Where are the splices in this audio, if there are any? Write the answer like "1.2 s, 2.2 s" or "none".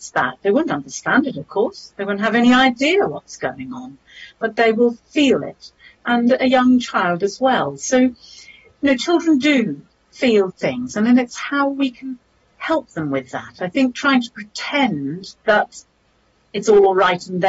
none